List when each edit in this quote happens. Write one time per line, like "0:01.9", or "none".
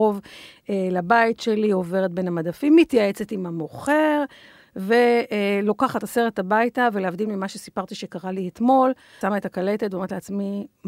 0:09.2